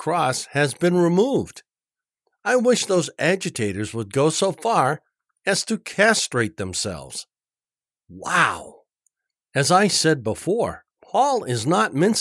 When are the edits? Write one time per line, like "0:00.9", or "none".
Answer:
0:08.0
0:10.9